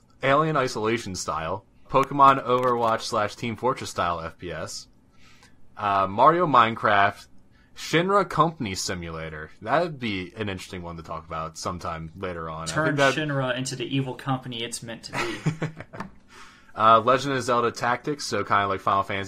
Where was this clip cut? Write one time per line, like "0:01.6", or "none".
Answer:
0:01.8